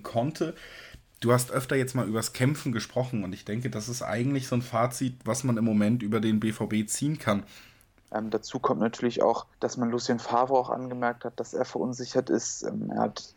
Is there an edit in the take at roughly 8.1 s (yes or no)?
yes